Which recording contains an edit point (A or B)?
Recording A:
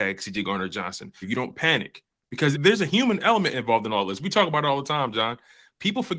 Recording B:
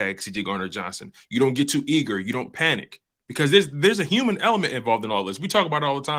A